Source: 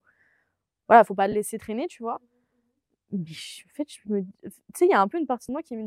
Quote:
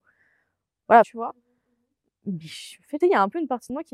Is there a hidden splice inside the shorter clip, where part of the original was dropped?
yes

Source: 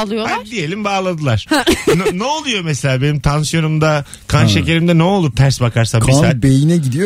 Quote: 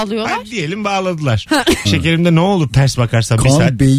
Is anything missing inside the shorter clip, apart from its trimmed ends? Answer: yes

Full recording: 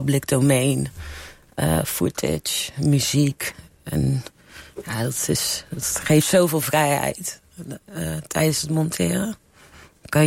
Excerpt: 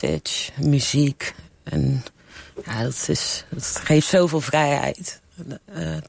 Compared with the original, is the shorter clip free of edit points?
yes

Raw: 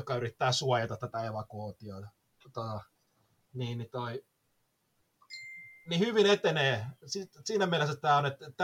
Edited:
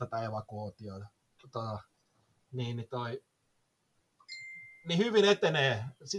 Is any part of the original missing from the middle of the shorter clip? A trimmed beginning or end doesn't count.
no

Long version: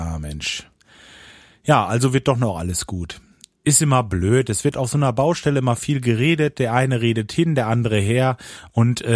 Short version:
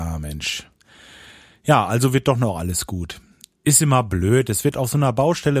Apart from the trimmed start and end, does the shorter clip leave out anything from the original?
no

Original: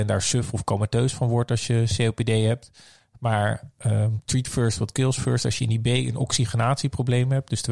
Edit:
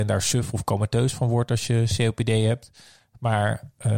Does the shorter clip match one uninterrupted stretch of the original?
yes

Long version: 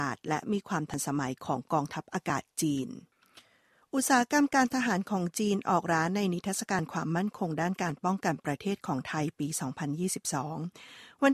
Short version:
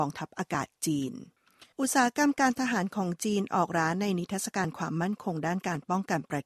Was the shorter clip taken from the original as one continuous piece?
no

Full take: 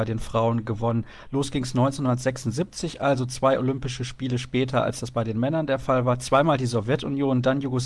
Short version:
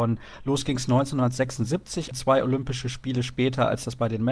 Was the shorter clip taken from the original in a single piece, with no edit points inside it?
no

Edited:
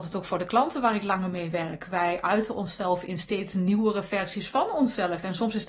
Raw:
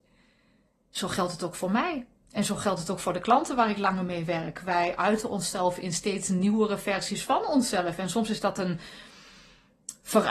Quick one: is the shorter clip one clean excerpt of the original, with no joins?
yes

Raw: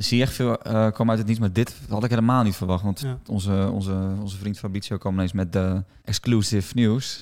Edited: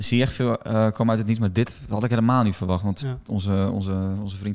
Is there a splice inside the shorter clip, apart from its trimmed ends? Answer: no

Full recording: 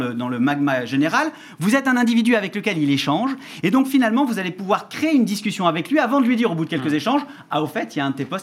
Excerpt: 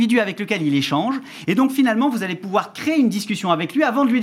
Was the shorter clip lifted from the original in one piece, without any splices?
yes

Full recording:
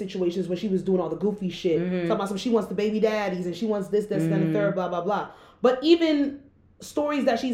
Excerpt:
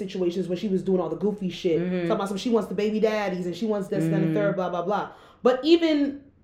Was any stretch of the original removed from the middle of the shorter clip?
yes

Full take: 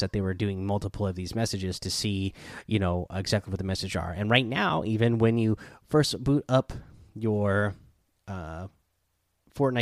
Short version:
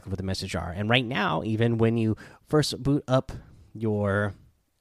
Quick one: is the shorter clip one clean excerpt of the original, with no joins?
yes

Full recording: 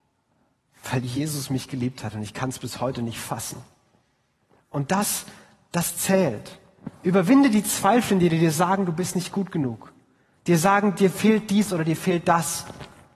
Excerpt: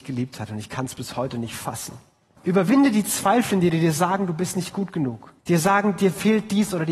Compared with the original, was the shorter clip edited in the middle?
yes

